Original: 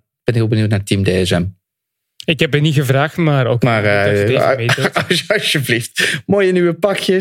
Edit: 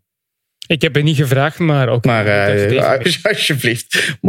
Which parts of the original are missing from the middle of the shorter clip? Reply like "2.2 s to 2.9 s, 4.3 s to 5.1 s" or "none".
4.6 s to 5.1 s